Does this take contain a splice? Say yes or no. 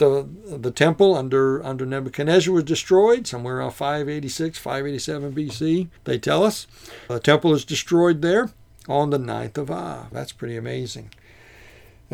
yes